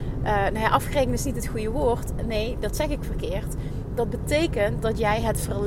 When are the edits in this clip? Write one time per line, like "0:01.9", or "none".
none